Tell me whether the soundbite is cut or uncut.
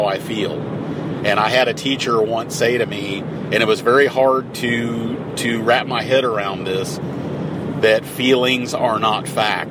uncut